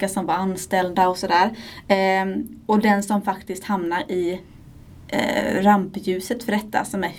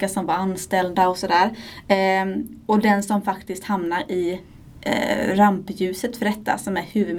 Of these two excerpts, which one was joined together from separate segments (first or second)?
second